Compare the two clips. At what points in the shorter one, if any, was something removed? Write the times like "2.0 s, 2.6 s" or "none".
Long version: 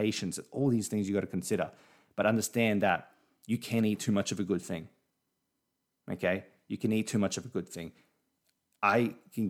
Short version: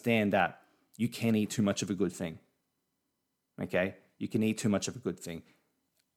none